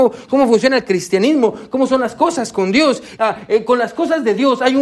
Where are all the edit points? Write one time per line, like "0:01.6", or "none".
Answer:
0:03.2

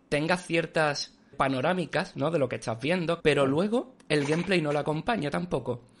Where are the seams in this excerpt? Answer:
0:01.3
0:03.2

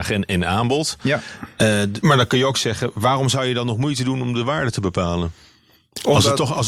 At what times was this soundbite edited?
0:02.0

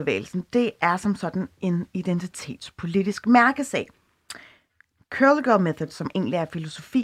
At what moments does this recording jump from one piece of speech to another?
none

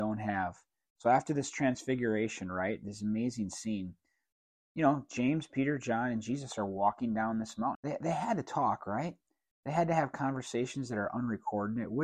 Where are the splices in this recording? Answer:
0:07.8

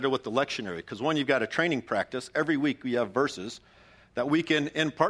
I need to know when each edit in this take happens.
none

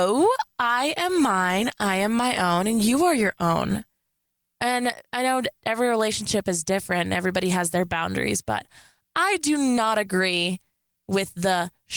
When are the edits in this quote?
none

